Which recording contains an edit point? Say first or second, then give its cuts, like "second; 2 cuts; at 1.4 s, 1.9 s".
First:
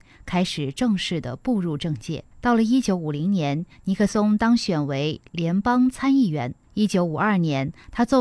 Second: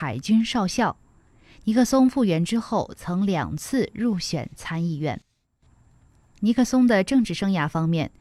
first; 2 cuts; at 2.3 s, 6.6 s